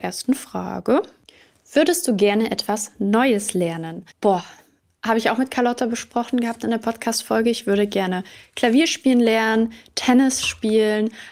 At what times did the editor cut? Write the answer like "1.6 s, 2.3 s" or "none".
4.1 s